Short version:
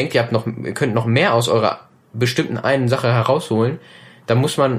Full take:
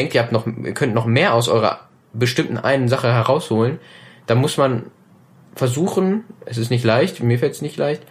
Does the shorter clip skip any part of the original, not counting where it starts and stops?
no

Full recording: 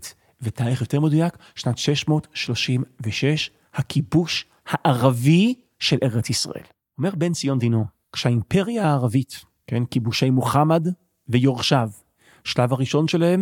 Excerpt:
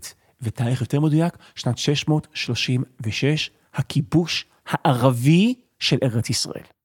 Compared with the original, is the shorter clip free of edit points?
yes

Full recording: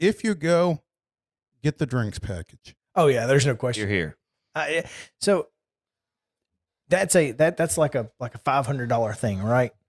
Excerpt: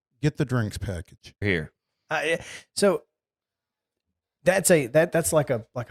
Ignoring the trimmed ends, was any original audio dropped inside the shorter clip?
yes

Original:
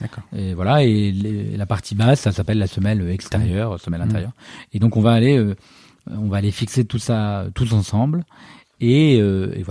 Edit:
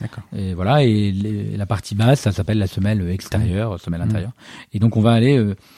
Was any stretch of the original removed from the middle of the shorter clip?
no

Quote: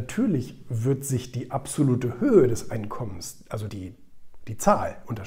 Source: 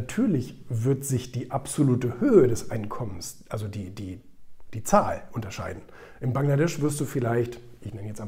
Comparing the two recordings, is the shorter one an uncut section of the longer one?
no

